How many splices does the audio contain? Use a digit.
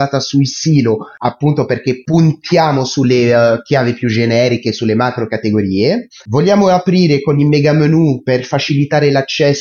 0